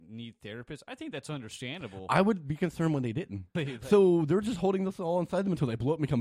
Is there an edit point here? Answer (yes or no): yes